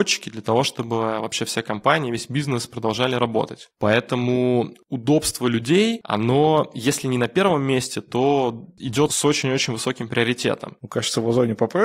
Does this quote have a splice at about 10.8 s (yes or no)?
yes